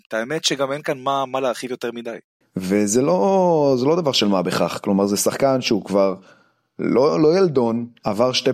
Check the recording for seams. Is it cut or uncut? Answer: cut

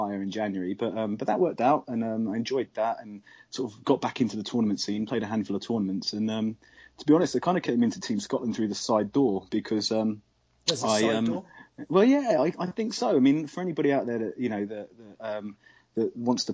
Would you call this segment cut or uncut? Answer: uncut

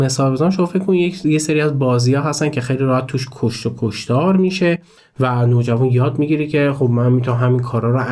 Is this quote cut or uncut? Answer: uncut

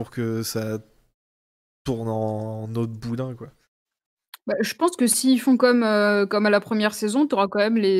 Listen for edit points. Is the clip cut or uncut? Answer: uncut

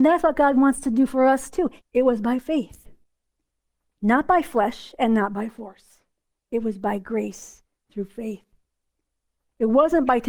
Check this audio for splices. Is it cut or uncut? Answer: cut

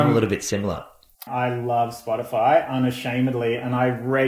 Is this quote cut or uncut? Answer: cut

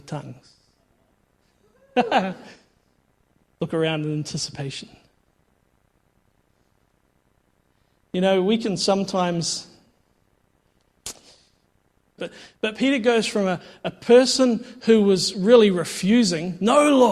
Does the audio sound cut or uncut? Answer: cut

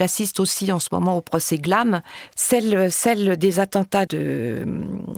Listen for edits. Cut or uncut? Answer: cut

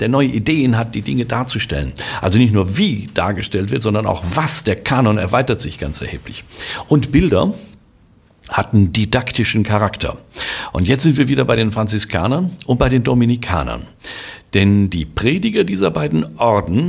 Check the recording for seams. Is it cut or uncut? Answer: uncut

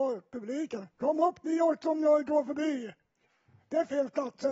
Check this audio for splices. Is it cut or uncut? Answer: uncut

